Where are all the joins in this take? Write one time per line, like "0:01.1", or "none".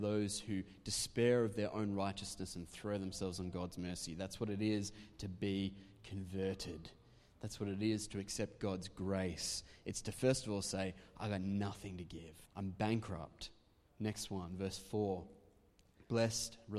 0:12.5
0:13.9